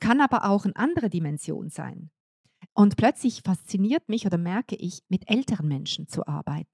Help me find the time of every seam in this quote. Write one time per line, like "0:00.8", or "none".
0:02.7
0:05.1